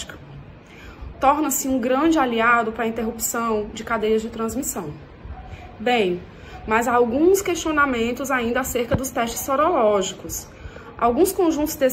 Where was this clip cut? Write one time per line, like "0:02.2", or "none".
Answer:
0:01.1

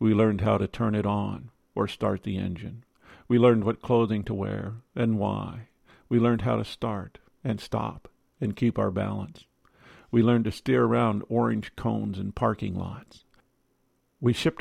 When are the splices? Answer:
none

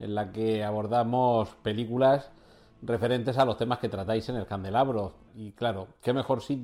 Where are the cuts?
0:05.3

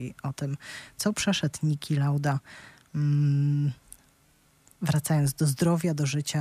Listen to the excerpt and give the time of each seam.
none

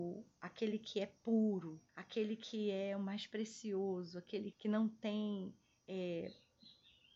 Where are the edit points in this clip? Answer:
0:01.9
0:04.5

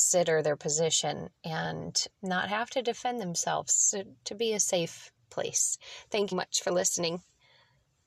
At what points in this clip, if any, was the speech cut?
0:02.1
0:06.3

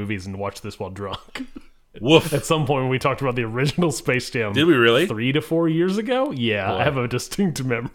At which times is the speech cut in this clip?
none

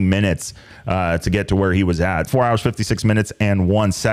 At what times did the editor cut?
0:02.3

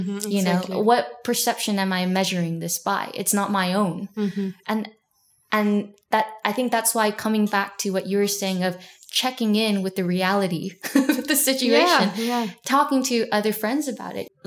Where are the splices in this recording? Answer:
0:04.6

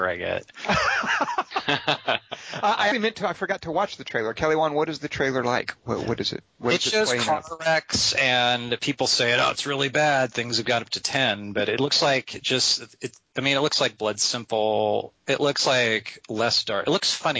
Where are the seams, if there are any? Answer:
0:02.9

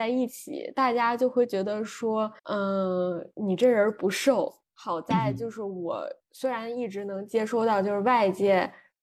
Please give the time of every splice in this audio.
0:02.4
0:04.6

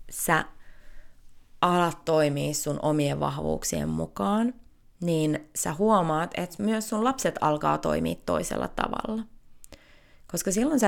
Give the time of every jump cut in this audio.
none

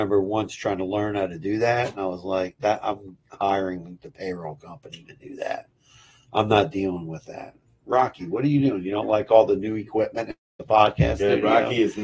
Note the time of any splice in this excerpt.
0:02.6

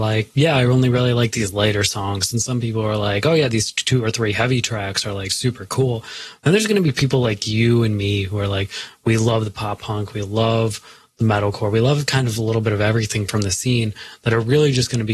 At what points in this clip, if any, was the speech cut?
none

